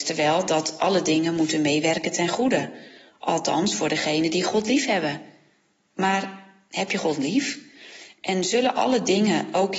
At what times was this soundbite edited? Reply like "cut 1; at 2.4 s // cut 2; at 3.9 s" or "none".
none